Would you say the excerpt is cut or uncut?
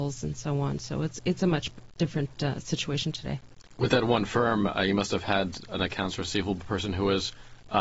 uncut